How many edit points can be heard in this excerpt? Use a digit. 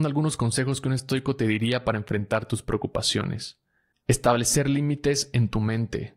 1